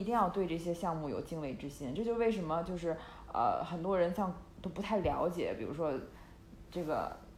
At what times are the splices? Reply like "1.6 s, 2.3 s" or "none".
none